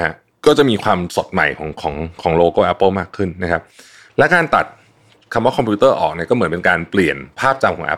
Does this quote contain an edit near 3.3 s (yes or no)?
yes